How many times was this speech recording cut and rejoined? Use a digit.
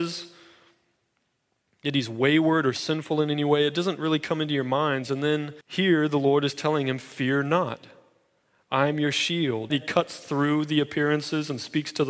2